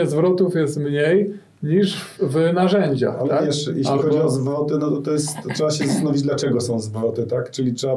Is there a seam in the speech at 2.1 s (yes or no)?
yes